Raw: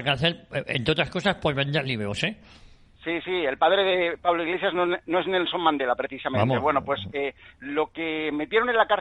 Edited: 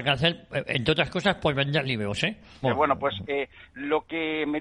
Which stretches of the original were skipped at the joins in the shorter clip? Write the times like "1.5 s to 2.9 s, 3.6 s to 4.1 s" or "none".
2.6 s to 6.5 s